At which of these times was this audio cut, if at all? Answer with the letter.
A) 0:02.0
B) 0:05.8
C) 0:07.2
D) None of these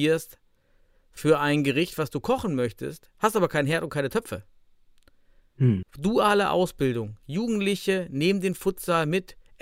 B